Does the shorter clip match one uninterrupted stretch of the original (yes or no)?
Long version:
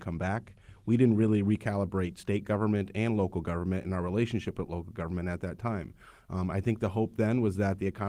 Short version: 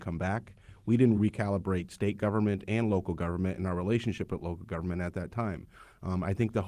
no